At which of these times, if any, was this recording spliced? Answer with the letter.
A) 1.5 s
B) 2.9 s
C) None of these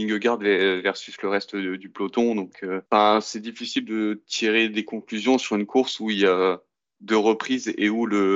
B